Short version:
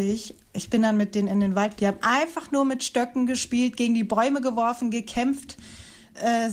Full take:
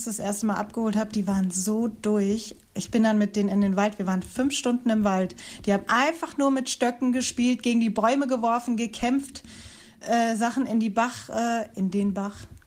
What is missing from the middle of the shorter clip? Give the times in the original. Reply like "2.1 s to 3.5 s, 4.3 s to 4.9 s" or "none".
4.0 s to 5.6 s

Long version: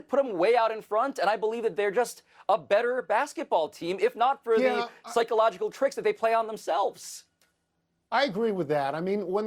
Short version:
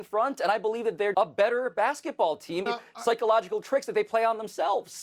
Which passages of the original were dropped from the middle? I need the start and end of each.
1.9 s to 2.5 s, 4.0 s to 4.7 s

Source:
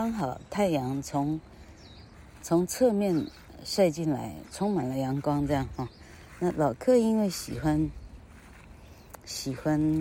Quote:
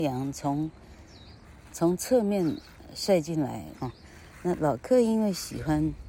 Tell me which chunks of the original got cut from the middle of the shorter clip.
4.5 s to 5.8 s

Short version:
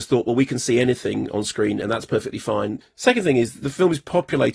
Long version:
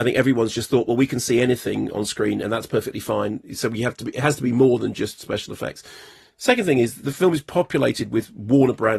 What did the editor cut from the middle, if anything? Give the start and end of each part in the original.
3.4 s to 6.2 s

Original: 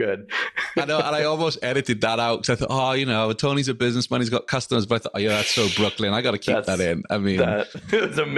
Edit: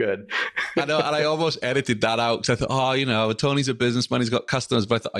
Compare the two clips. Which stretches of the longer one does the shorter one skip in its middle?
none

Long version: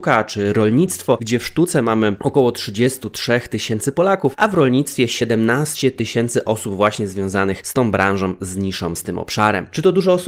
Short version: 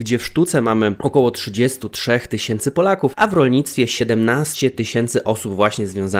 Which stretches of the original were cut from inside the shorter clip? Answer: none

